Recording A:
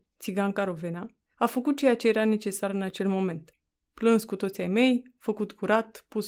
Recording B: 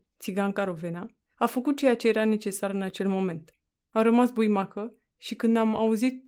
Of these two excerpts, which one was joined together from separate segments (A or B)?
B